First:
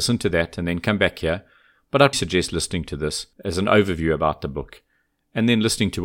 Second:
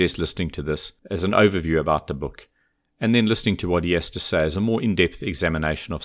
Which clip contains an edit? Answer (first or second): first